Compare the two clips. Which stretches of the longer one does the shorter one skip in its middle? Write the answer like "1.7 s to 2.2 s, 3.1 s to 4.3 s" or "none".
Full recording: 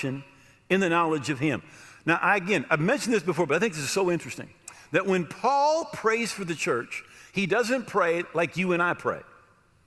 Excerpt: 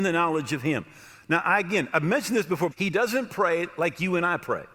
3.5 s to 7.3 s